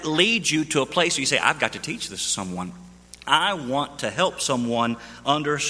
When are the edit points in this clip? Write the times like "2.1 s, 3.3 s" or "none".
none